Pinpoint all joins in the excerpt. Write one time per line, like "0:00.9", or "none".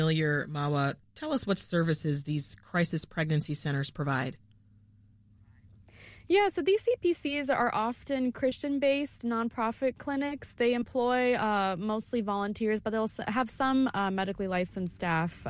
none